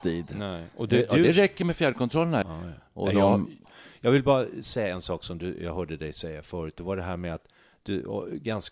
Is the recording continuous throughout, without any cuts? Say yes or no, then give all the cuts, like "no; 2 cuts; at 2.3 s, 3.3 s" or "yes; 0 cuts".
no; 1 cut; at 2.4 s